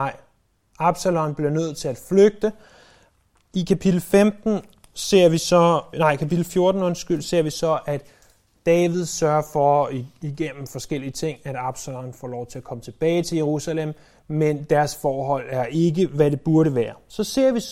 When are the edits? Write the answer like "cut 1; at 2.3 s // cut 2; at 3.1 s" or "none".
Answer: cut 1; at 5.9 s